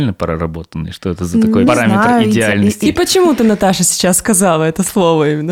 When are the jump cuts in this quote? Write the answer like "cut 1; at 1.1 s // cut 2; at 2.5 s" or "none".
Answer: cut 1; at 1.7 s